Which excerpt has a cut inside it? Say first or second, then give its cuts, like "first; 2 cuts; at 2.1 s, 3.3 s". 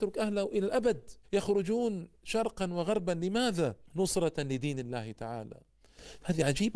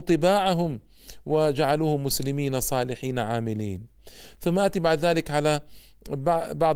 first; 2 cuts; at 1.2 s, 3.9 s